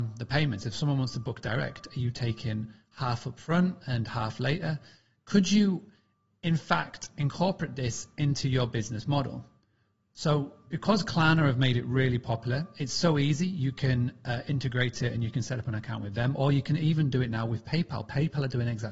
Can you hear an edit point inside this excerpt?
no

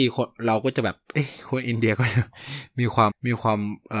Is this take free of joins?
no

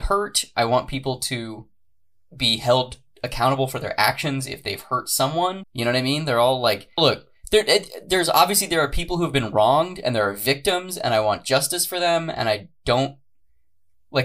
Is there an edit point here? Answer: yes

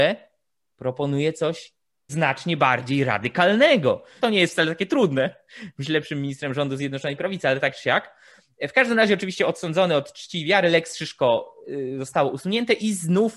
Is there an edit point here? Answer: yes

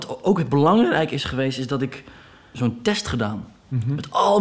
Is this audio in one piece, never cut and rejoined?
no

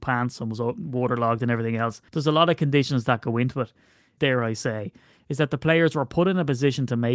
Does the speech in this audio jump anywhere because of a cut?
yes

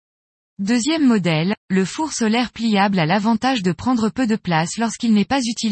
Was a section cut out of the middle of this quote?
yes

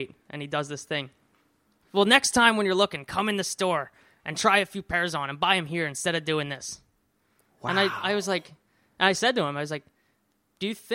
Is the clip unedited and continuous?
no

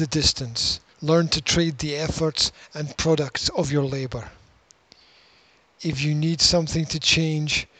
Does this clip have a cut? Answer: yes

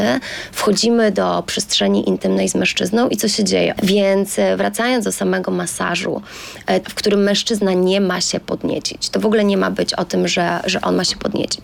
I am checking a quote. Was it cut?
yes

